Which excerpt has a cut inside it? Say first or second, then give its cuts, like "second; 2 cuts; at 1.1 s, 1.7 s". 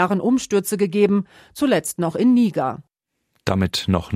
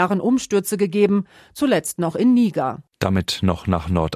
second; 1 cut; at 2.9 s